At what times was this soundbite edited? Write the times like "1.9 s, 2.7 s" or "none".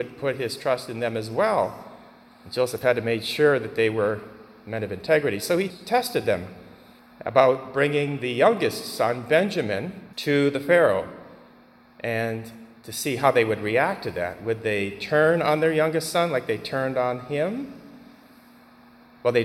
none